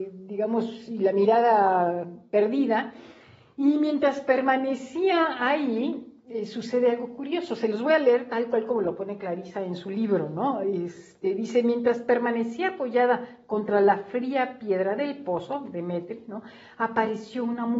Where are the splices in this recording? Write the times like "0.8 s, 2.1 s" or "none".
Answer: none